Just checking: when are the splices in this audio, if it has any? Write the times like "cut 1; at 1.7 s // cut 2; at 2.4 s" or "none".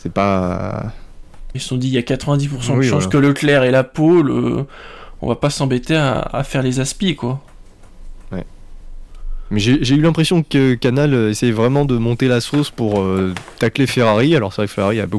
cut 1; at 1.5 s